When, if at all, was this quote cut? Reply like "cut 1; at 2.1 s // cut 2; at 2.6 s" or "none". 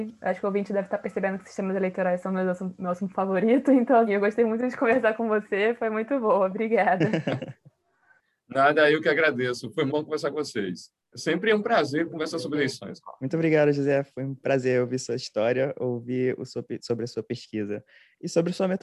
cut 1; at 4.1 s // cut 2; at 9.9 s